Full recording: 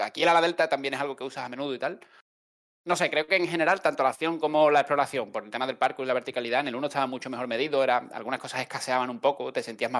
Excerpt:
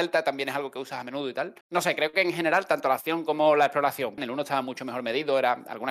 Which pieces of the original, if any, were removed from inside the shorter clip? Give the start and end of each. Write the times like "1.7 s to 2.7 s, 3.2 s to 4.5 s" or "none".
2.1 s to 2.8 s, 5.3 s to 6.6 s